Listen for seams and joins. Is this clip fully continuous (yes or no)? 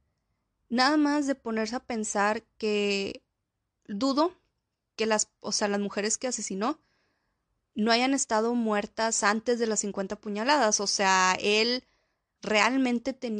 yes